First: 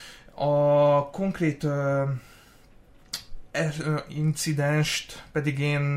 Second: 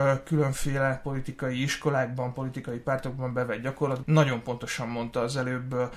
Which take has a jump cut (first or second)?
second